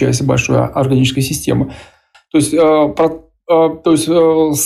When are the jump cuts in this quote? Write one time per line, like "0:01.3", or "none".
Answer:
0:02.1